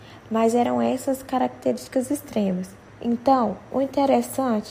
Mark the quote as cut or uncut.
cut